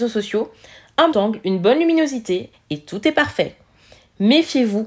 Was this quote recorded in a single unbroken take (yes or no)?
no